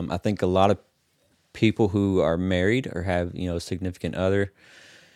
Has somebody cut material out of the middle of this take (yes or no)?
no